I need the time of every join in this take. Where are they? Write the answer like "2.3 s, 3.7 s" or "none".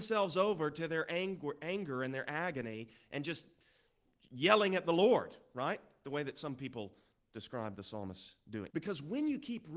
8.7 s